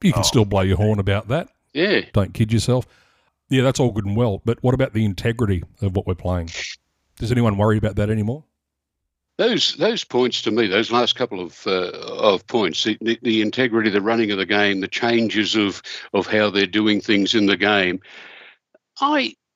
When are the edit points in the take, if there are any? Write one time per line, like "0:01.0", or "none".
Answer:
0:02.1
0:09.8